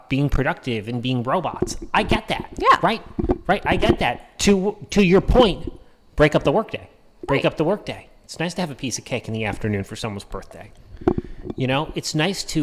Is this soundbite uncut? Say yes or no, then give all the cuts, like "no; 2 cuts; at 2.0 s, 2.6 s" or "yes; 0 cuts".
yes; 0 cuts